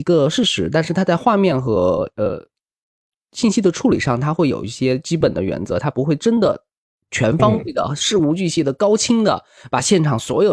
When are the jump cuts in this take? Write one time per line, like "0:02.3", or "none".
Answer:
none